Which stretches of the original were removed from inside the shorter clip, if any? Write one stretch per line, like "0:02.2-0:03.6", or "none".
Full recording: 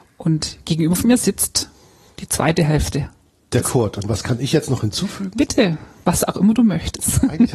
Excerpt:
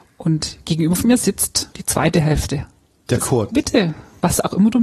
0:01.7-0:02.1
0:03.9-0:05.3